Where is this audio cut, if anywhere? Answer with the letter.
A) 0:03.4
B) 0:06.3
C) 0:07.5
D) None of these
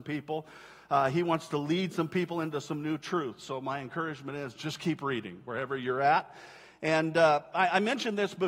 D